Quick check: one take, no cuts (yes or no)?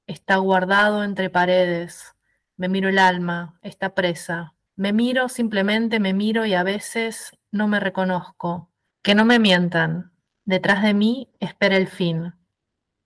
no